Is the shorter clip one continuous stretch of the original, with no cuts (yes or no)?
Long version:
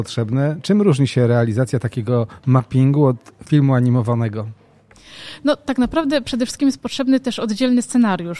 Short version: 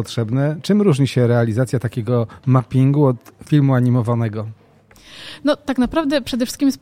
yes